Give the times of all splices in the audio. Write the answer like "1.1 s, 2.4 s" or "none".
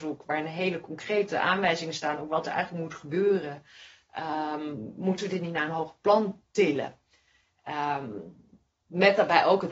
none

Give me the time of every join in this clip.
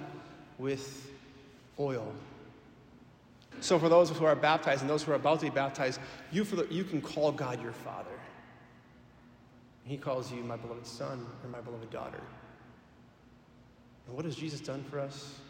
3.5 s

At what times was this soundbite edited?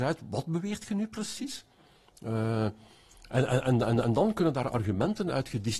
none

